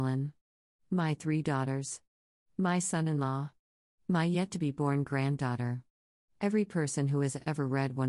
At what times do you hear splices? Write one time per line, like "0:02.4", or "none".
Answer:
none